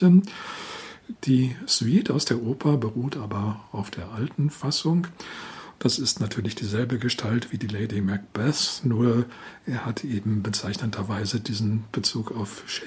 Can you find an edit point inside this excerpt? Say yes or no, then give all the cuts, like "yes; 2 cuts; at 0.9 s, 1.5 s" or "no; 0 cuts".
yes; 2 cuts; at 1.1 s, 5.8 s